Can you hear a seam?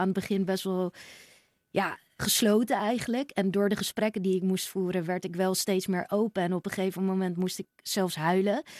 yes; 1 cut; at 2.2 s

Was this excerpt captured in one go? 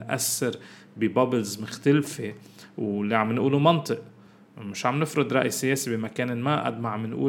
yes; 0 cuts

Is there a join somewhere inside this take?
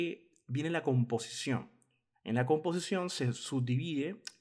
no; 0 cuts

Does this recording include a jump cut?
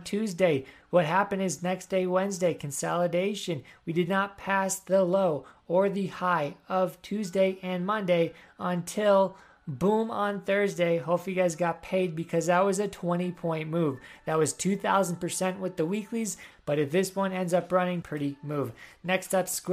yes; 2 cuts; at 16.5 s, 18.0 s

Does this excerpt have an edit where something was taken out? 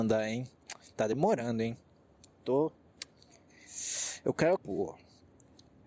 yes; 1 cut; at 4.6 s

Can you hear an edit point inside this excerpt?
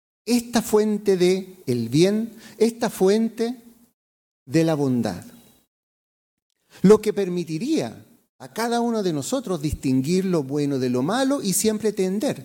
no; 0 cuts

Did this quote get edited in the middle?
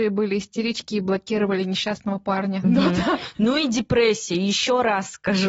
yes; 1 cut; at 2.6 s

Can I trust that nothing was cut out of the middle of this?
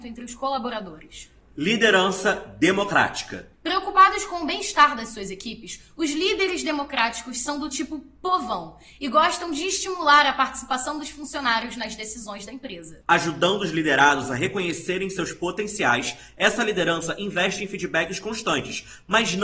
no; 1 cut; at 13.0 s

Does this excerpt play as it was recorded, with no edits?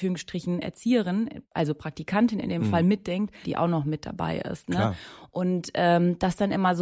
no; 1 cut; at 3.4 s

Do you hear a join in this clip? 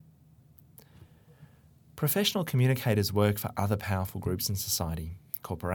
no; 0 cuts

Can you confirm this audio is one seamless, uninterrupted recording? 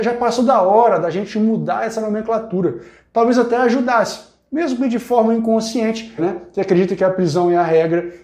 no; 1 cut; at 6.2 s

